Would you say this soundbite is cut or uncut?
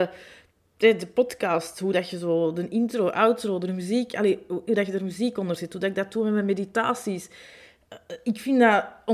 uncut